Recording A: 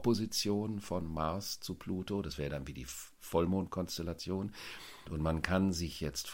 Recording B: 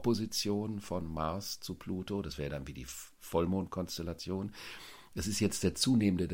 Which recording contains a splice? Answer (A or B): A